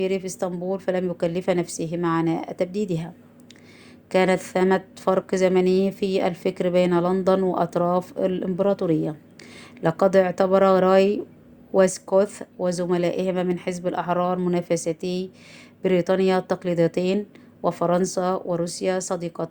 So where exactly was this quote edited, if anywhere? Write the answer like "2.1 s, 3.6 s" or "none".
none